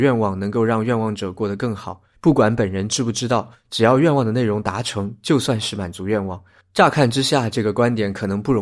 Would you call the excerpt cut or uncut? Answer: cut